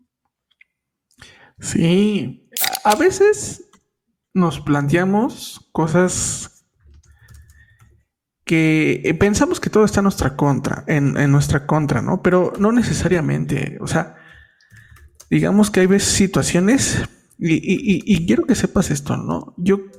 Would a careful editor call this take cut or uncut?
uncut